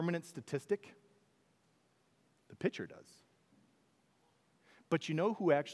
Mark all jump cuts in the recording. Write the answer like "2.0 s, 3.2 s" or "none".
none